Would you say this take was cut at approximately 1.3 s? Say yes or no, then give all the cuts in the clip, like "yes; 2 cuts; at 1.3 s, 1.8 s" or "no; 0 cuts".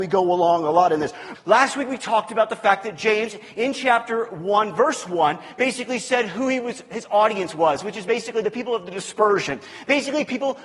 yes; 1 cut; at 1.3 s